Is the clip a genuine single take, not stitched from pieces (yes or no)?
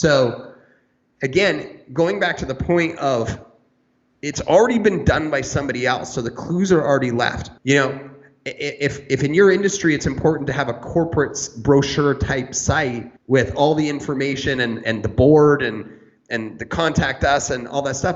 no